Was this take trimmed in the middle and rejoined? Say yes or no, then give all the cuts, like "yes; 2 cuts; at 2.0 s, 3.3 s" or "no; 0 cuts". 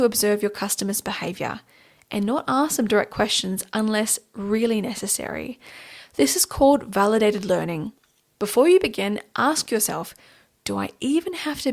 no; 0 cuts